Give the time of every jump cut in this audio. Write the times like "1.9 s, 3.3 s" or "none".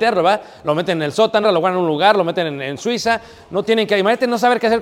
1.4 s